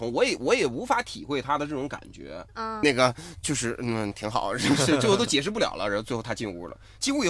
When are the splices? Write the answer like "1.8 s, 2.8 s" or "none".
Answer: 2.8 s